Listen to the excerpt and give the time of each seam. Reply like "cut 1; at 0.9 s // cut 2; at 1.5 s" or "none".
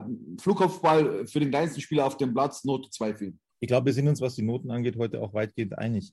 cut 1; at 3.5 s